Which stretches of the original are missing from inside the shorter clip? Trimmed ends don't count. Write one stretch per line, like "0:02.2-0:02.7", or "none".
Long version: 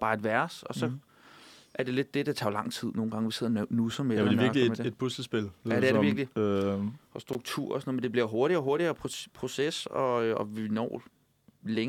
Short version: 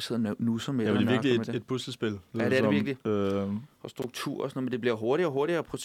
none